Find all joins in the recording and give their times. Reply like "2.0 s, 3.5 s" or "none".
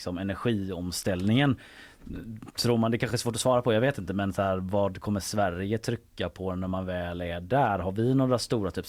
none